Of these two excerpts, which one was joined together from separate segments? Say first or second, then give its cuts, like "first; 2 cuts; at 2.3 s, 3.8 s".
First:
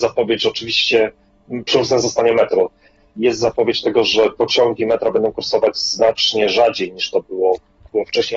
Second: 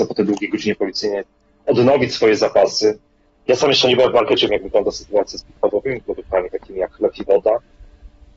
second; 1 cut; at 4.5 s